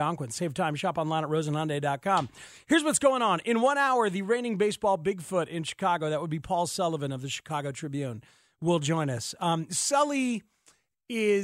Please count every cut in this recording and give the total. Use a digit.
0